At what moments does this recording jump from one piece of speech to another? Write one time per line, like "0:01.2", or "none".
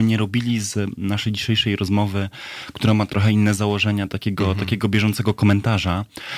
0:03.1